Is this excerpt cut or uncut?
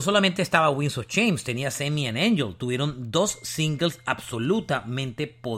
uncut